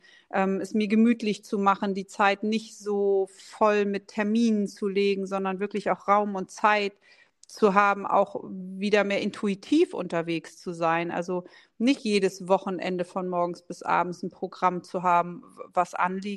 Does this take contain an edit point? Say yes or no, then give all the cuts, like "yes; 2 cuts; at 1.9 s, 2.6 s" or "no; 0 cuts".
no; 0 cuts